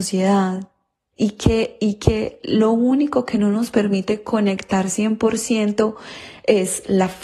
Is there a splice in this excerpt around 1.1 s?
yes; 1 cut; at 1.1 s

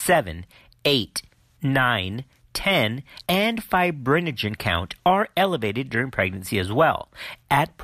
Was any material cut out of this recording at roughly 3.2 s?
yes; 1 cut; at 3.2 s

